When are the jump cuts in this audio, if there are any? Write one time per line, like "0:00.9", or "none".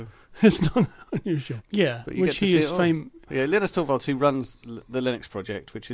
0:01.6
0:03.2